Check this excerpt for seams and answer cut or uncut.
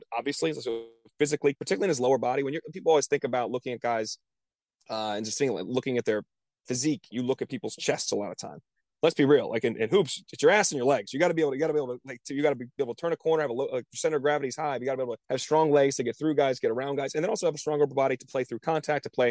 cut